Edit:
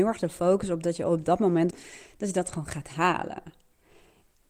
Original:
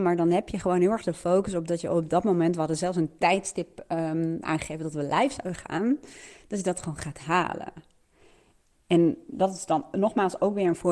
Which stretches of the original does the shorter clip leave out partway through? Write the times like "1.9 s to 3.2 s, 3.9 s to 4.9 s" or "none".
2.5 s to 6.0 s